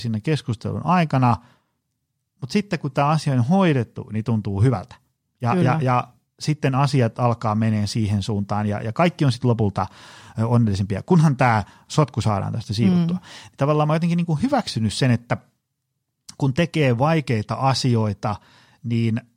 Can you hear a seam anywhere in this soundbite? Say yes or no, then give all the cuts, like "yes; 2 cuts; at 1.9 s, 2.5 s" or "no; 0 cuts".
no; 0 cuts